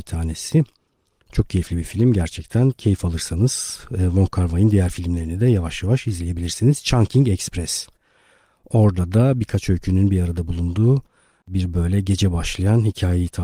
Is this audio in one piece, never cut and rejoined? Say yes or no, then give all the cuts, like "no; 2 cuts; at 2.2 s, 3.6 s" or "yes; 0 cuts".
yes; 0 cuts